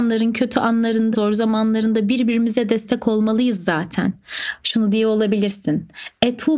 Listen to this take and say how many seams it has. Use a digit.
2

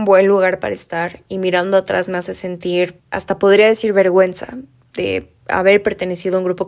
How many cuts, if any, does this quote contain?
0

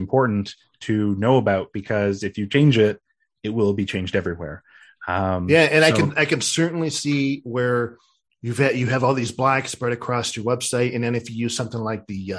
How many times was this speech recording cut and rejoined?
0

